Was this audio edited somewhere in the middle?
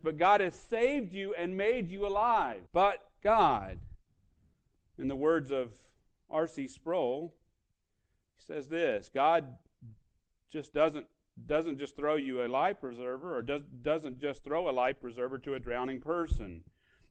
yes; 1 cut; at 2.7 s

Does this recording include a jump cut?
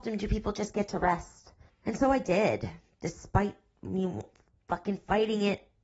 yes; 1 cut; at 1.7 s

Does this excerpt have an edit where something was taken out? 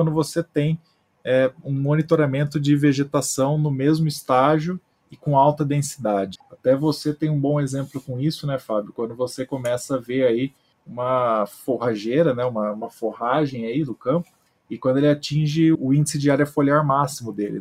yes; 2 cuts; at 6.4 s, 15.7 s

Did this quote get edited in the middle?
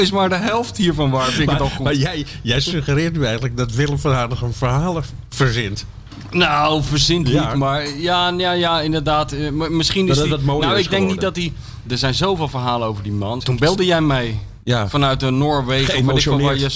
yes; 2 cuts; at 11.9 s, 13.4 s

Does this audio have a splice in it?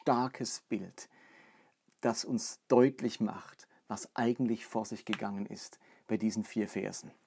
no; 0 cuts

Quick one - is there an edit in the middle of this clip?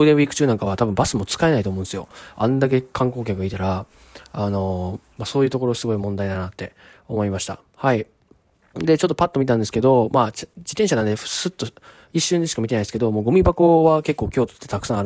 yes; 1 cut; at 5.2 s

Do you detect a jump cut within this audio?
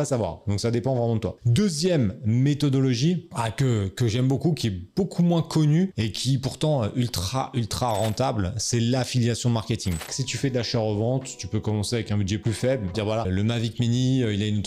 yes; 2 cuts; at 10.1 s, 12.9 s

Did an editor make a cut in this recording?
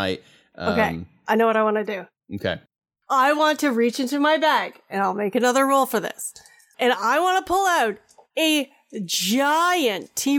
no; 0 cuts

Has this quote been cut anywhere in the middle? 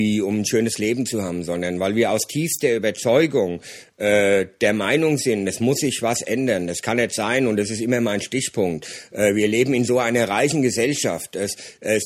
no; 0 cuts

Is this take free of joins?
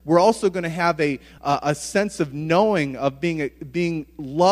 yes; 0 cuts

